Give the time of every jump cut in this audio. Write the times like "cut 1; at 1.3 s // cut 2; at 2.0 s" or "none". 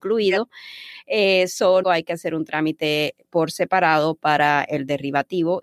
cut 1; at 1.8 s